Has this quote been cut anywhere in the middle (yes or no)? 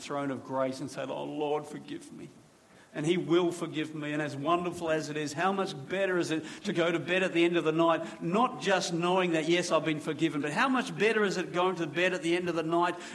no